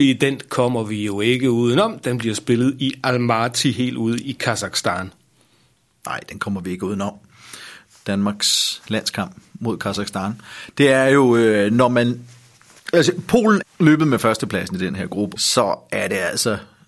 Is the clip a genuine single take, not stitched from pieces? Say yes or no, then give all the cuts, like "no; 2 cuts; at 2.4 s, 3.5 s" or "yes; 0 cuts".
no; 2 cuts; at 13.6 s, 15.4 s